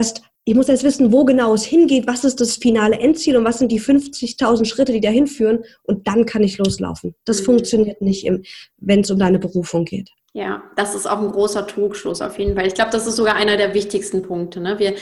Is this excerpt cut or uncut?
uncut